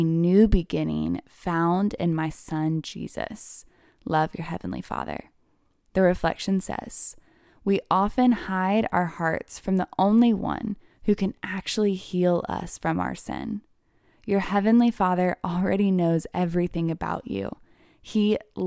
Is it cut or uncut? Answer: uncut